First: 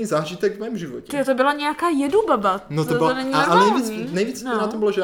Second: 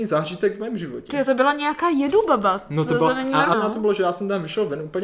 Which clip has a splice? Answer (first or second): second